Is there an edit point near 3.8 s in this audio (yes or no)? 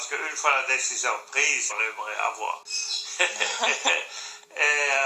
no